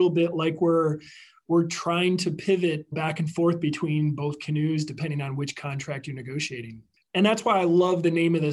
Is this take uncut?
no; 1 cut; at 7.0 s

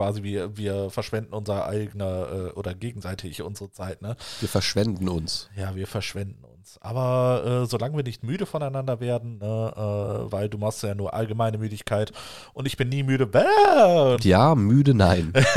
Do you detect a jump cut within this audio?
yes; 1 cut; at 14.2 s

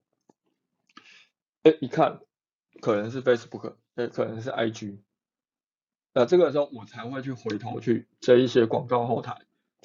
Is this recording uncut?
yes; 0 cuts

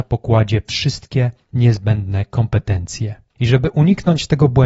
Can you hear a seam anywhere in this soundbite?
yes; 1 cut; at 3.3 s

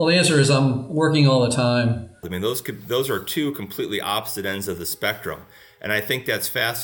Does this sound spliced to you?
yes; 1 cut; at 2.2 s

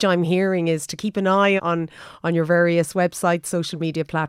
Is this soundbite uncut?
no; 1 cut; at 1.6 s

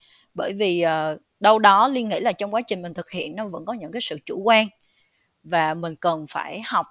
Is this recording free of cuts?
no; 1 cut; at 1.3 s

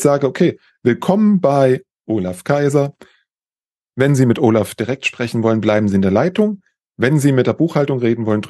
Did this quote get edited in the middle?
no; 0 cuts

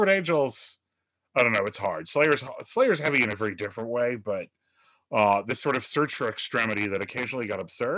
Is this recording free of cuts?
yes; 0 cuts

